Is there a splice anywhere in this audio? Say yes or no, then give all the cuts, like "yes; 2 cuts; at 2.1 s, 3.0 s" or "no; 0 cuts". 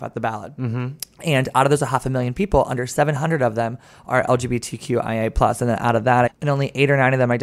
yes; 1 cut; at 6.3 s